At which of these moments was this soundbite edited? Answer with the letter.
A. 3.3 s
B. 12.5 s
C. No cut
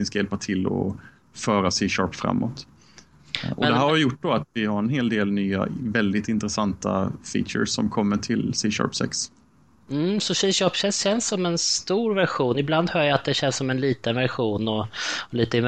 C